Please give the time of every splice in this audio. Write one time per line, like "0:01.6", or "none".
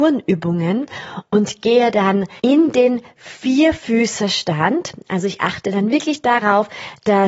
0:02.4